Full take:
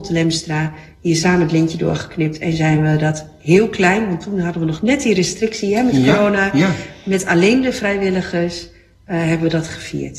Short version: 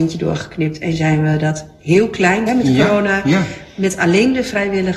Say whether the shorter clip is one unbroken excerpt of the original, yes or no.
no